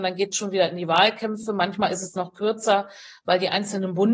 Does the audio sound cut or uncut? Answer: uncut